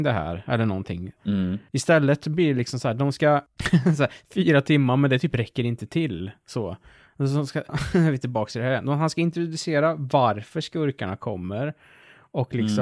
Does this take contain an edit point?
yes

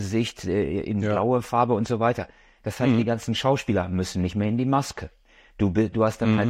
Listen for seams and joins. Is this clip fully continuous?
yes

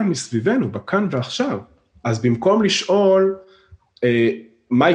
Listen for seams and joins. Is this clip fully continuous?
no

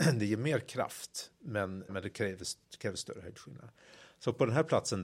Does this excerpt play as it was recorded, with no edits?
no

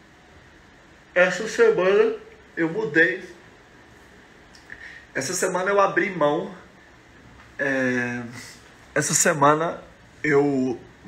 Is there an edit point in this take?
no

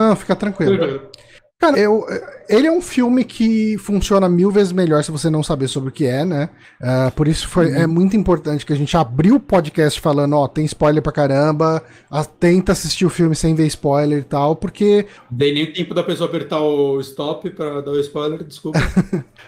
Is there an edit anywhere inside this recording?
yes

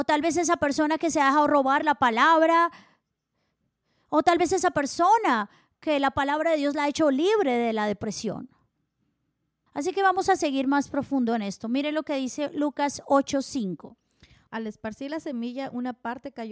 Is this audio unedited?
no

